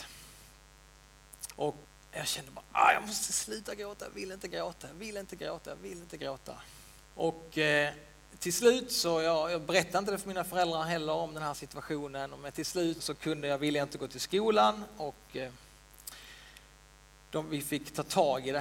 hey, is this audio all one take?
no; 3 cuts; at 1.5 s, 7.0 s, 13.0 s

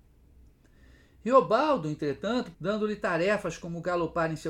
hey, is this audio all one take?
no; 1 cut; at 2.5 s

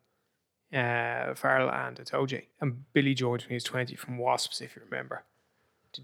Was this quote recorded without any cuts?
no; 1 cut; at 2.5 s

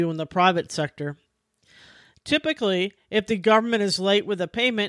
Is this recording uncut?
yes; 0 cuts

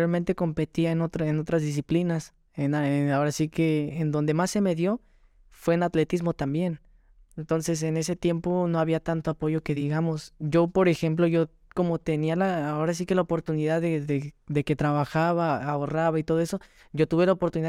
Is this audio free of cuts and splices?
yes; 0 cuts

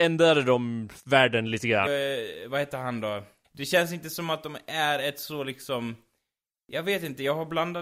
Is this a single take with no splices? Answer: no; 2 cuts; at 1.9 s, 3.4 s

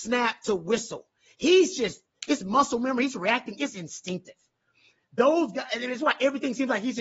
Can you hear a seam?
no; 0 cuts

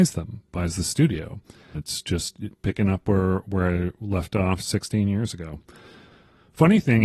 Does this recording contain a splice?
yes; 1 cut; at 1.7 s

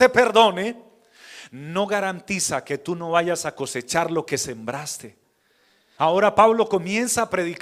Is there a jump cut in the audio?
yes; 1 cut; at 6.0 s

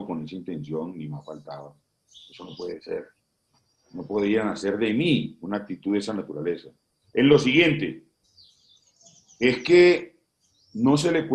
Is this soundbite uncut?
yes; 0 cuts

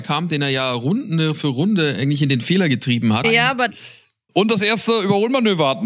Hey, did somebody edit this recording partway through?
yes; 1 cut; at 3.2 s

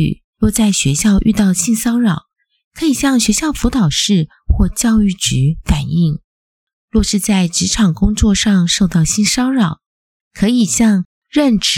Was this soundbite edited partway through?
no; 0 cuts

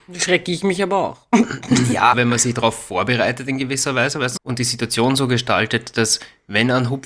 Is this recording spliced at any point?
yes; 2 cuts; at 2.1 s, 4.4 s

